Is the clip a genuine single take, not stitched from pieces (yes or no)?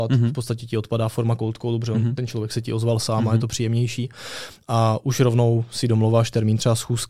yes